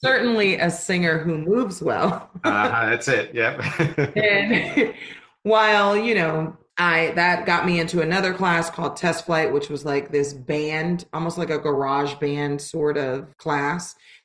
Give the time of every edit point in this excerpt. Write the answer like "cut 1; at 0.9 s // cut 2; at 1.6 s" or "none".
none